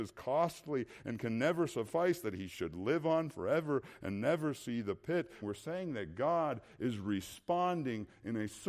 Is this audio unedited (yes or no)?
no